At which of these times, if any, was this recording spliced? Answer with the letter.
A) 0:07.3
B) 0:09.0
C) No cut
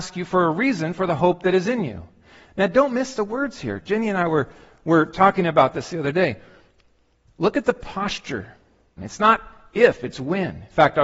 B